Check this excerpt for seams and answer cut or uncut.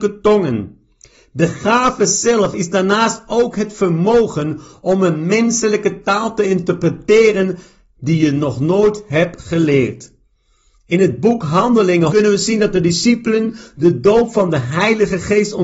cut